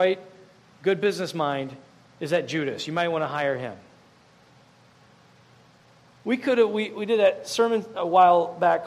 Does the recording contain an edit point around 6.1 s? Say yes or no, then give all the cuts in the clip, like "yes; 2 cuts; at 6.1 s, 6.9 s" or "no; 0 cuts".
yes; 1 cut; at 6.1 s